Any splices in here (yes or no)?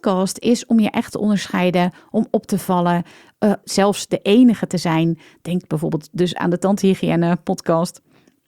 yes